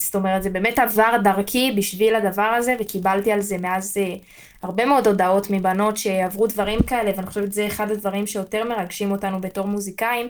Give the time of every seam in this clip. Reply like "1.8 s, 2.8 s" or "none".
none